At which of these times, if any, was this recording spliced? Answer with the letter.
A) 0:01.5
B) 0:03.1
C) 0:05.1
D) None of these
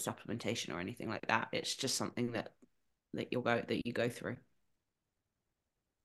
D